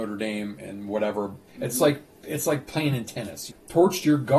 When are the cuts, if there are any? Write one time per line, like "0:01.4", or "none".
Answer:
0:01.5
0:03.5